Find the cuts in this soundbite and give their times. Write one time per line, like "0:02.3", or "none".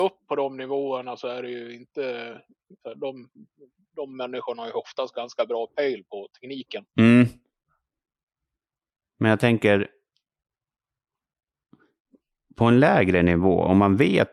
none

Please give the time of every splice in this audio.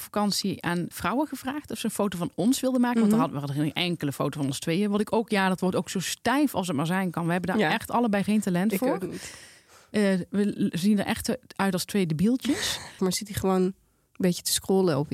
0:00.9
0:13.0

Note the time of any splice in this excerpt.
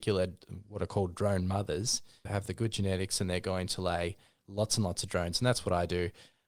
0:02.3

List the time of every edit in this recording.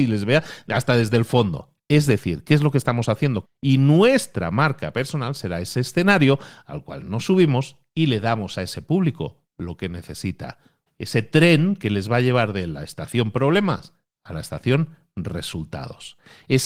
0:03.4
0:10.9

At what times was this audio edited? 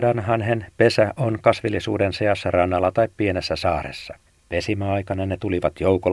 0:04.3

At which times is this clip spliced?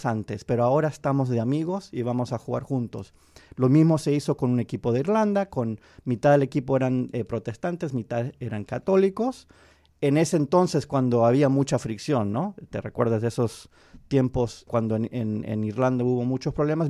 none

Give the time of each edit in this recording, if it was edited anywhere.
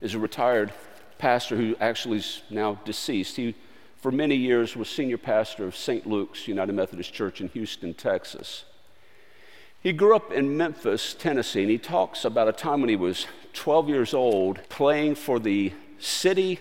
0:14.7

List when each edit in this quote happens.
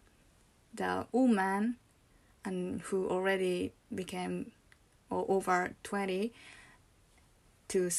0:01.1

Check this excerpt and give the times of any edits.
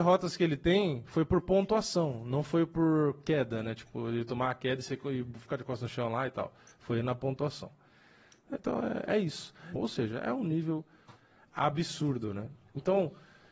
0:09.8

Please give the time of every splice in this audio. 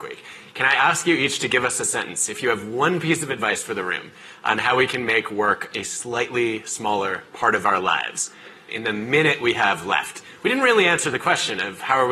0:08.7

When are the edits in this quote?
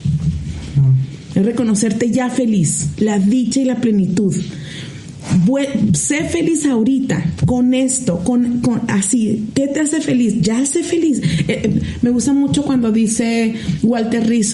none

